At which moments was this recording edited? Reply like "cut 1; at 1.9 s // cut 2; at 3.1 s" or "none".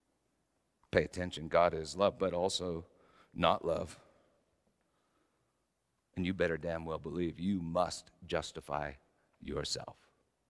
none